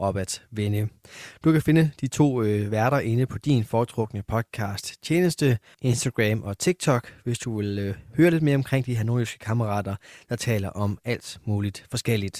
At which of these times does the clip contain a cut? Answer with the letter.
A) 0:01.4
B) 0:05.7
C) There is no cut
B